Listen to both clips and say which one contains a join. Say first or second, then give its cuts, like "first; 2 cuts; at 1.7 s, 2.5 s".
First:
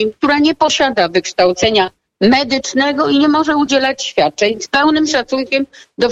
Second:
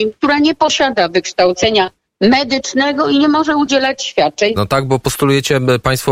second; 1 cut; at 4.6 s